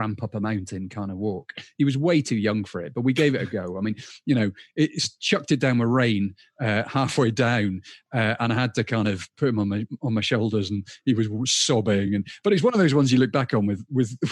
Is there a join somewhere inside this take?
no; 0 cuts

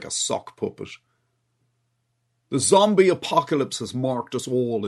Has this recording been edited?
no; 0 cuts

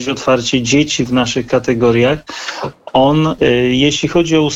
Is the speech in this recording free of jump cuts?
no; 1 cut; at 3.4 s

